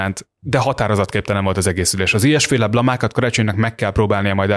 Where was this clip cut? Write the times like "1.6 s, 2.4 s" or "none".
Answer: none